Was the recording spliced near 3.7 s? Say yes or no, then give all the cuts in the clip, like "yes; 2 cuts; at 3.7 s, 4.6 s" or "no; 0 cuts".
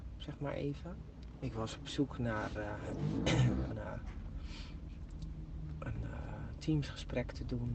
yes; 2 cuts; at 1.3 s, 3.7 s